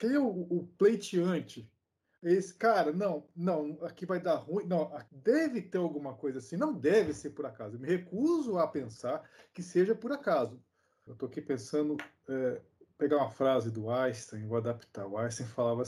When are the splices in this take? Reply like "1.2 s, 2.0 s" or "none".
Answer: 5.1 s, 11.1 s